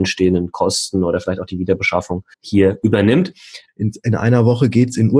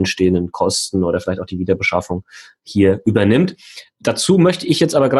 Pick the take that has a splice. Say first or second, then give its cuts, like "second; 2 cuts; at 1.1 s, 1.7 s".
first; 2 cuts; at 2.3 s, 3.7 s